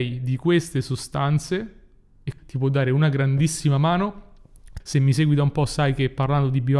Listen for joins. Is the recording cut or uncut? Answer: cut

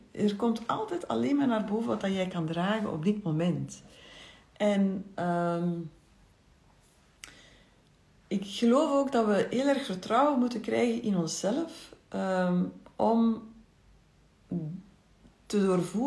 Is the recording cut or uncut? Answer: uncut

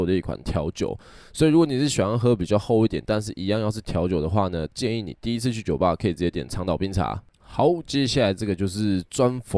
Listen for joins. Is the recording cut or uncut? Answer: uncut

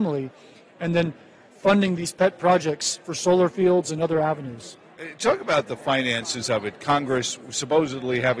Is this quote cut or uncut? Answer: uncut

